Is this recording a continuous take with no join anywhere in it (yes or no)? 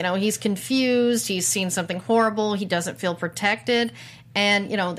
yes